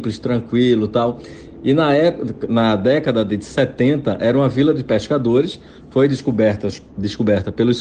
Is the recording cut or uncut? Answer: uncut